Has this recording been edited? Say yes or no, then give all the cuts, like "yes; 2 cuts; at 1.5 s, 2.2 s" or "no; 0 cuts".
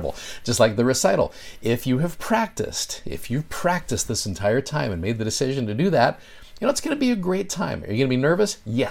no; 0 cuts